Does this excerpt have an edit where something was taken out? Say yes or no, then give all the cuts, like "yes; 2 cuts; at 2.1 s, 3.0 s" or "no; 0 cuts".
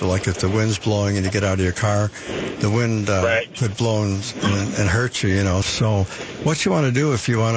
yes; 1 cut; at 5.6 s